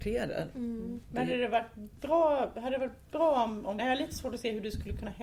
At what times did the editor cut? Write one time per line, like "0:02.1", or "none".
0:03.8